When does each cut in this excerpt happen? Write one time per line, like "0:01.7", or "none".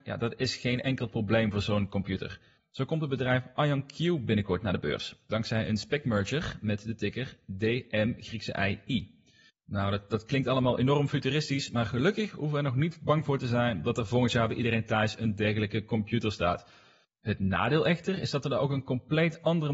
0:02.6
0:09.5
0:17.0